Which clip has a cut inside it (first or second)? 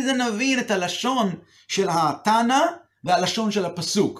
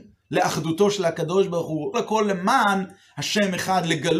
second